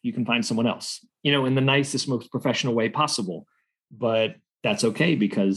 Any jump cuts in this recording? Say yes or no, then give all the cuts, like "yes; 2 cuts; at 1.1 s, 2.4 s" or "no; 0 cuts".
no; 0 cuts